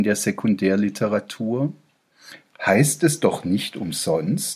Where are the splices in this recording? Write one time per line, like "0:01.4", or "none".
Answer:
0:02.4